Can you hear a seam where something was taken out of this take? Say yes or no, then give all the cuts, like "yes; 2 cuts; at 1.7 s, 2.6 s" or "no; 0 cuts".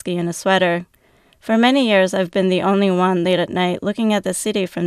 no; 0 cuts